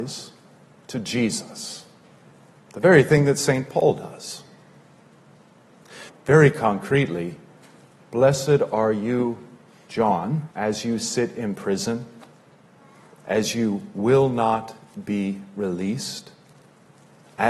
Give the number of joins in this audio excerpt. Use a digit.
2